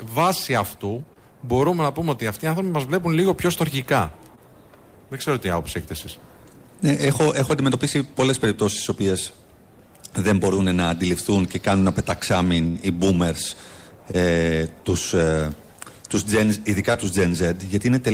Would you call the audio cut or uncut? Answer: uncut